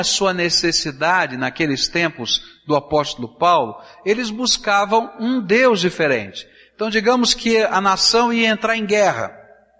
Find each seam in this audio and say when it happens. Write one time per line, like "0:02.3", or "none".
none